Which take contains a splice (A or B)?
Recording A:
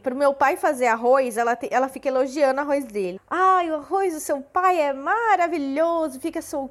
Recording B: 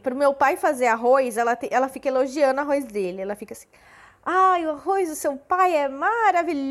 A